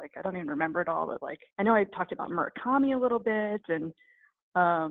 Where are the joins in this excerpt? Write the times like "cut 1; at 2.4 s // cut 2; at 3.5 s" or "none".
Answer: cut 1; at 1.5 s